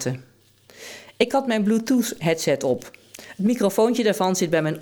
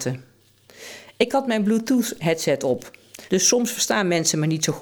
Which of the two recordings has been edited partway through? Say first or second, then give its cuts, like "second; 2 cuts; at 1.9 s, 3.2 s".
second; 1 cut; at 3.3 s